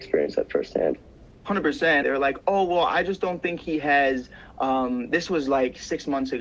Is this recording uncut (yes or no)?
no